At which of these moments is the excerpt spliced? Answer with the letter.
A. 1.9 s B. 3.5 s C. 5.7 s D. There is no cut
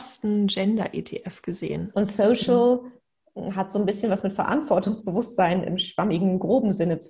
A